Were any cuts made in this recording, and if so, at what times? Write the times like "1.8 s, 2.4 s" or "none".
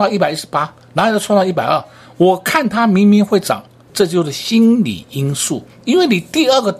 3.9 s